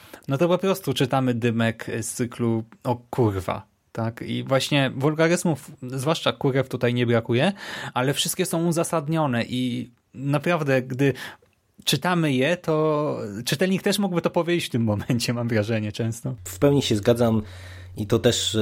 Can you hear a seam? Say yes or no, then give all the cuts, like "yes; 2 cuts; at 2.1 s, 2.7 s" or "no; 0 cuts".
no; 0 cuts